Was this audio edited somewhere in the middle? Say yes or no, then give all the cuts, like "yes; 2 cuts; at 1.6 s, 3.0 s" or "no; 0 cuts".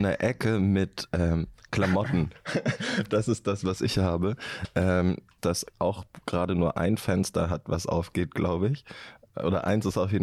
yes; 1 cut; at 5.4 s